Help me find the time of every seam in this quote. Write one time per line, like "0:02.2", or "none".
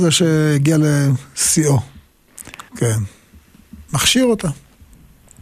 0:02.7
0:03.9